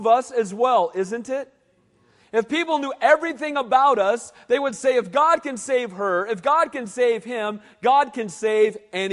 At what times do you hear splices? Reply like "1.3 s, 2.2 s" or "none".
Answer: none